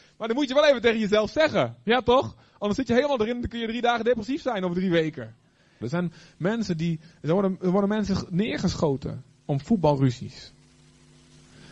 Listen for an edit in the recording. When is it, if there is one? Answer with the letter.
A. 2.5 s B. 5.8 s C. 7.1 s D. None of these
B